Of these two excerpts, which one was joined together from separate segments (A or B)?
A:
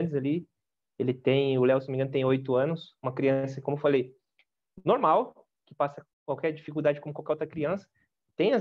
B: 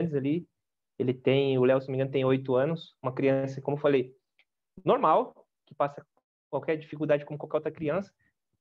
A